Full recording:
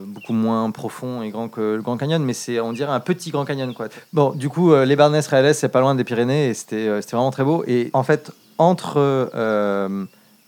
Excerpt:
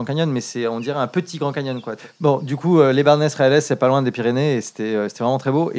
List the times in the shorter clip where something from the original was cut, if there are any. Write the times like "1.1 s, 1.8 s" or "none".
none

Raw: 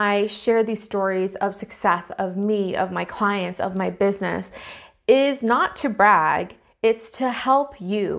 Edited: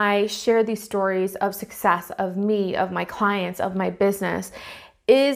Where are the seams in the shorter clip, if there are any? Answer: none

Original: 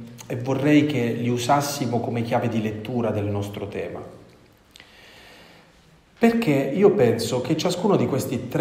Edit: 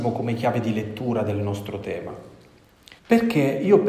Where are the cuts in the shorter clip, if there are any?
3.0 s

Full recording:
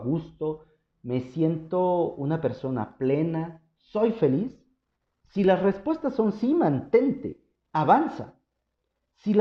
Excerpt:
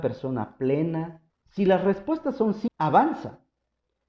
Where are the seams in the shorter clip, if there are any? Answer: 1.3 s, 2.7 s

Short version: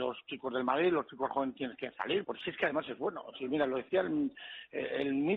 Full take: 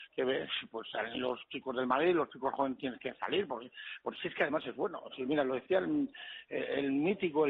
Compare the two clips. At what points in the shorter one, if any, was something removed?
2.2 s

